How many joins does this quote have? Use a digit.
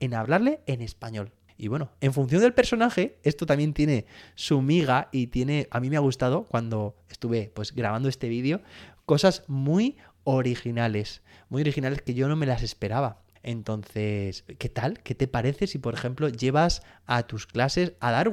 0